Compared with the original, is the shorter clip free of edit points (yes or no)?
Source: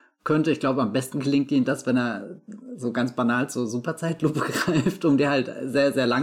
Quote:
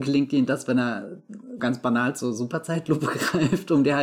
no